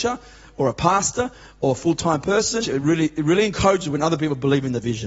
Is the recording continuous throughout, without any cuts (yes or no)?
no